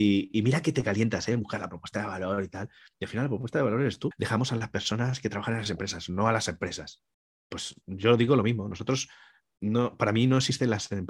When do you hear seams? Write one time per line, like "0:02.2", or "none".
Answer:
0:04.1